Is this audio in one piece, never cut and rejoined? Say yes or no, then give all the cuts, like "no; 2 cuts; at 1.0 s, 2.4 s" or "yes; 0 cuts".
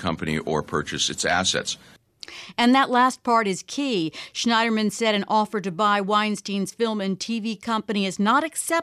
yes; 0 cuts